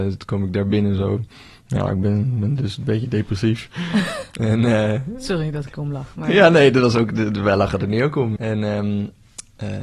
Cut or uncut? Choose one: cut